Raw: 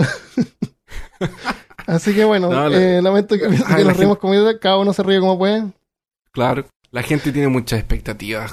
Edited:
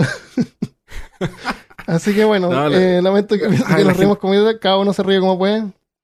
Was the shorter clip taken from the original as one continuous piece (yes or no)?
yes